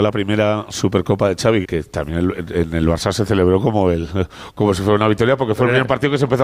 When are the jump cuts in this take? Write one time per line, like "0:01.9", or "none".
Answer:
0:01.6